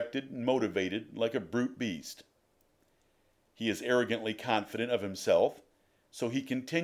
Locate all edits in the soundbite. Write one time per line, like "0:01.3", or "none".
none